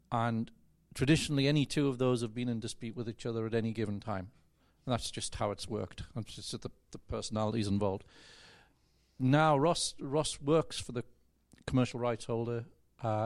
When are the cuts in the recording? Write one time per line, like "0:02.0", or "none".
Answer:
none